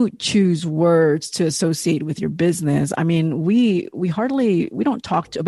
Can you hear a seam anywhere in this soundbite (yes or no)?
no